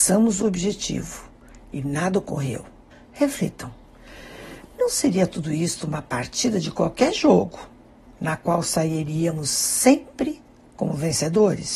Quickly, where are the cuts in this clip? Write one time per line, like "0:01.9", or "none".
0:02.9